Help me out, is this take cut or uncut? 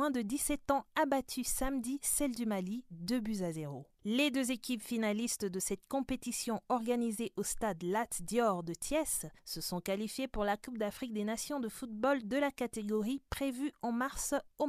uncut